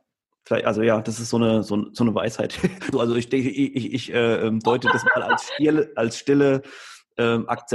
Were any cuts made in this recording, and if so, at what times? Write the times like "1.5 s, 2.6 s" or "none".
2.9 s